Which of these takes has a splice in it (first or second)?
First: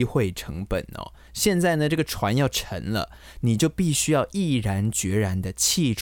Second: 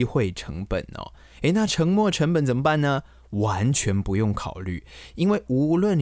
first